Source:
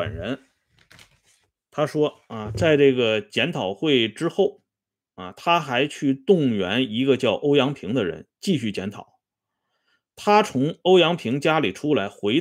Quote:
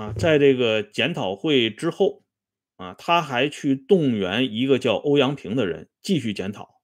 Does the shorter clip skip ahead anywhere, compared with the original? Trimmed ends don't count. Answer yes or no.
no